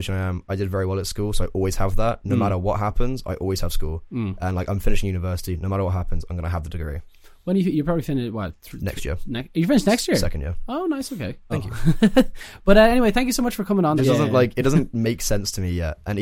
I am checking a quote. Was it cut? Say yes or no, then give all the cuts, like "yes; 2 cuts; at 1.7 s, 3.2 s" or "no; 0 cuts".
yes; 2 cuts; at 11.5 s, 14.0 s